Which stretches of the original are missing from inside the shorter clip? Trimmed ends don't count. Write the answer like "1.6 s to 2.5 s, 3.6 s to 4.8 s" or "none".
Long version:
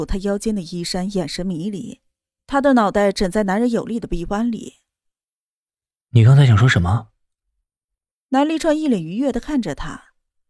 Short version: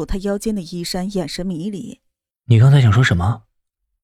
2.3 s to 6.0 s